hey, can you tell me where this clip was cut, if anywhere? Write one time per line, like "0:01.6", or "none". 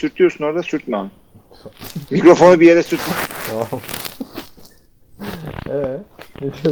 0:02.1